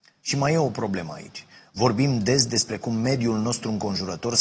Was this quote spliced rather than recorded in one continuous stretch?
no; 0 cuts

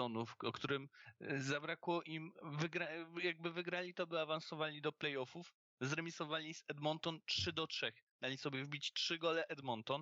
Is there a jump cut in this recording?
no; 0 cuts

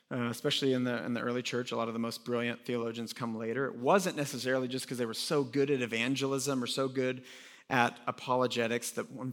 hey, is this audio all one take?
yes; 0 cuts

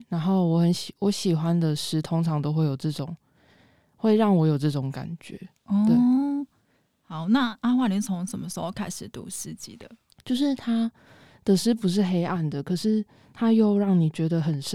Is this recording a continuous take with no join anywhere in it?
no; 1 cut; at 10.2 s

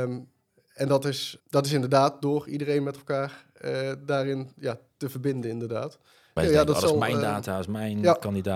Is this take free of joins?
no; 2 cuts; at 1.4 s, 6.4 s

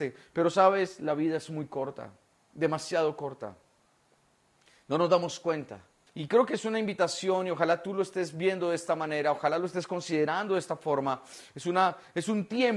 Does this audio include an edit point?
yes; 1 cut; at 6.1 s

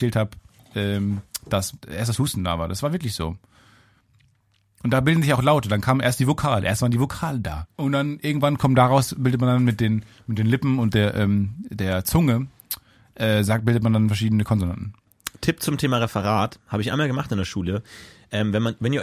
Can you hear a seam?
no; 0 cuts

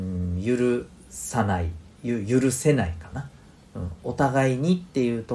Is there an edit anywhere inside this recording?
yes; 1 cut; at 1.9 s

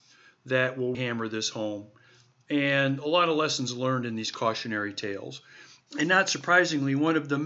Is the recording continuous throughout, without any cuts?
no; 2 cuts; at 0.9 s, 5.8 s

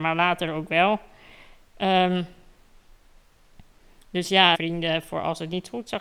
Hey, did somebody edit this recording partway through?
yes; 1 cut; at 4.5 s

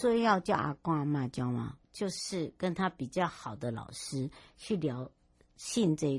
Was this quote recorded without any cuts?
no; 1 cut; at 1.8 s

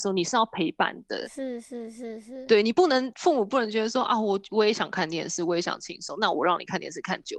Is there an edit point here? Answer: no; 0 cuts

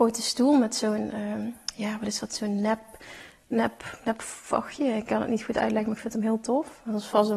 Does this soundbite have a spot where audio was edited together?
no; 0 cuts

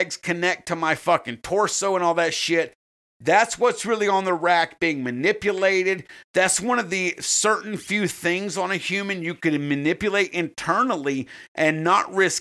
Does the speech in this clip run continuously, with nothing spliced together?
yes; 0 cuts

